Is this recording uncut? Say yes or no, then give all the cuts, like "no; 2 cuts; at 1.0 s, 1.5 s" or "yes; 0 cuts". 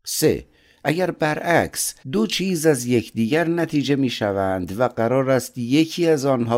no; 1 cut; at 2.0 s